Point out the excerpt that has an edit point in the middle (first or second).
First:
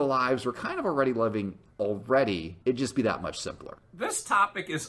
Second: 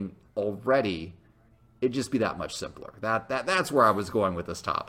first